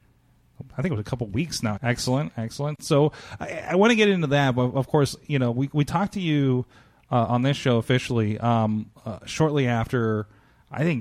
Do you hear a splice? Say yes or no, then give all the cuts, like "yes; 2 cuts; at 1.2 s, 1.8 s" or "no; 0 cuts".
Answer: yes; 1 cut; at 1.8 s